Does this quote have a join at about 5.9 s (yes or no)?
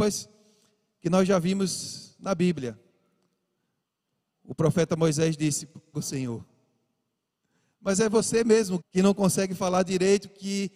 yes